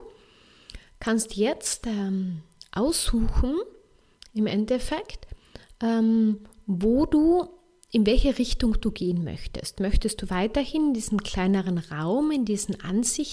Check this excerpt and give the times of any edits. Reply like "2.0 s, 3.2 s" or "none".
none